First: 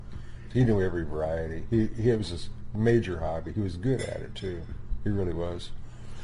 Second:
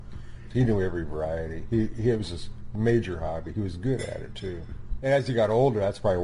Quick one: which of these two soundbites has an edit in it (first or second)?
second